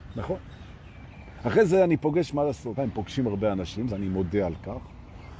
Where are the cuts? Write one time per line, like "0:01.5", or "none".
0:02.8
0:03.9